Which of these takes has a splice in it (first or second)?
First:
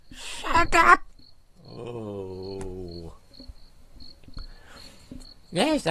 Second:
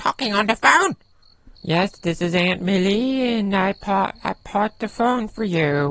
second